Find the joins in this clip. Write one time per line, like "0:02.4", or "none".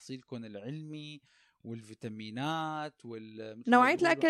none